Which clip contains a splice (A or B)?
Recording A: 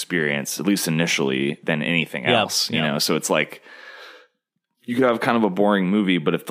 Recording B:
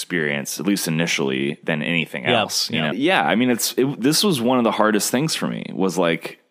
B